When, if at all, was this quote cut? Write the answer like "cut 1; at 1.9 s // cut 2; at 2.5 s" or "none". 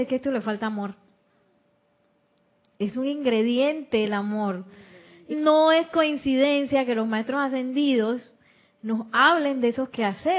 cut 1; at 5.3 s